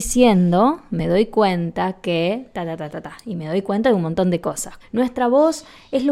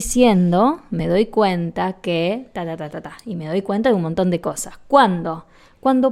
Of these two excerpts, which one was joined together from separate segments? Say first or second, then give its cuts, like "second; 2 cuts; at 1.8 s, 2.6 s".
first; 1 cut; at 4.8 s